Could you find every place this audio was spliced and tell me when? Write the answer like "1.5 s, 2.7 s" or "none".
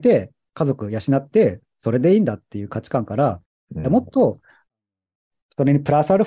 none